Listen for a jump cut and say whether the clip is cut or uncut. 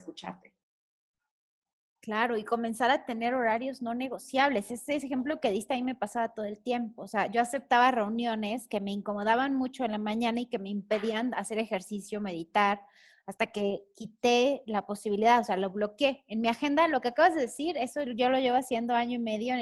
uncut